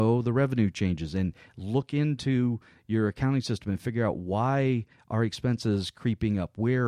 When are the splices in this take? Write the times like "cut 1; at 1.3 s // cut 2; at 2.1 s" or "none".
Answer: none